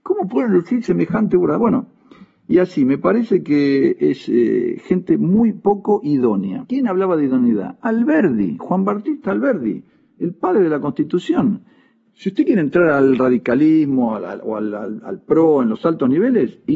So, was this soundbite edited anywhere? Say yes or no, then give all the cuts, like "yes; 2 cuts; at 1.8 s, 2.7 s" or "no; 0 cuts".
no; 0 cuts